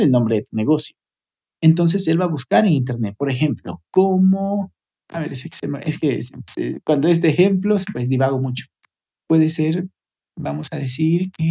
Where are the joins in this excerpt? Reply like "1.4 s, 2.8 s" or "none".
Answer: 4.9 s